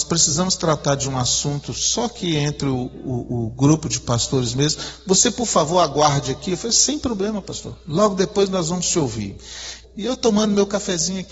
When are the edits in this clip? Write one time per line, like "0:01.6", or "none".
0:09.8

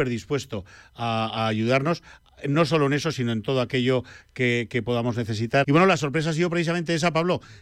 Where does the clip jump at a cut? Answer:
0:05.6

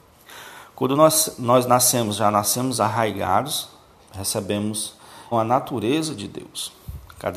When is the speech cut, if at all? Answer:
0:04.0
0:05.3

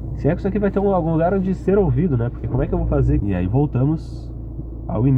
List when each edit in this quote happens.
0:03.2

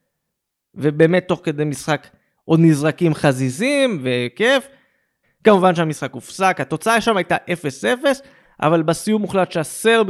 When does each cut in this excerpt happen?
0:05.2

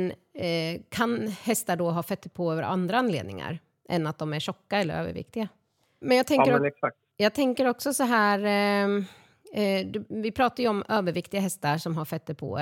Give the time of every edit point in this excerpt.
0:06.0

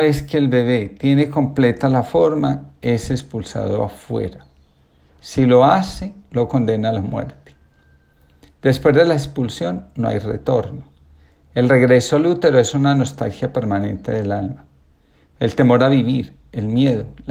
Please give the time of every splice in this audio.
0:05.1

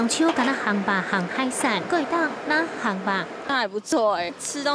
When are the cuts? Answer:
0:01.9
0:03.4

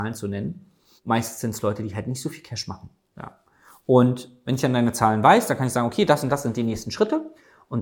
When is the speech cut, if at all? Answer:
none

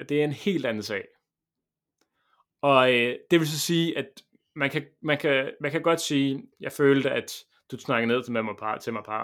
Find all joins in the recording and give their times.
0:06.5

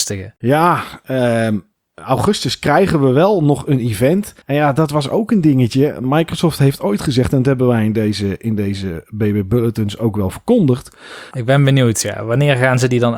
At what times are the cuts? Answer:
0:04.4
0:11.3

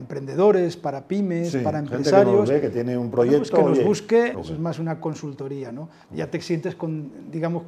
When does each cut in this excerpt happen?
0:04.3

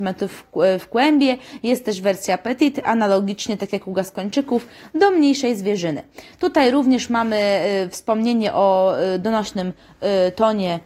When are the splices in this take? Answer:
none

